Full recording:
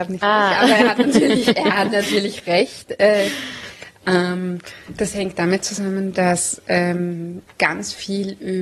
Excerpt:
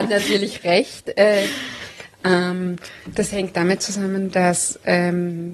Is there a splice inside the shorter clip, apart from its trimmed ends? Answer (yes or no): no